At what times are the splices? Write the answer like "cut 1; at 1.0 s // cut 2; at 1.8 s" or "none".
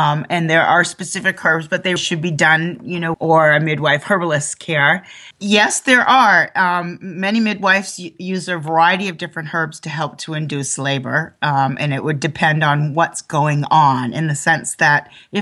cut 1; at 2.0 s // cut 2; at 3.1 s // cut 3; at 5.3 s